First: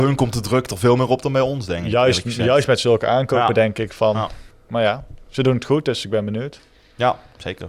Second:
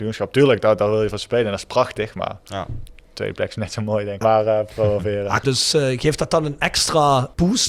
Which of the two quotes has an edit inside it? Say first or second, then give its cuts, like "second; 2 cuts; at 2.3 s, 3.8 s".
second; 2 cuts; at 4.2 s, 5.4 s